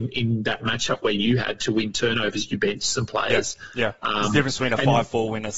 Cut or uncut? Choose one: uncut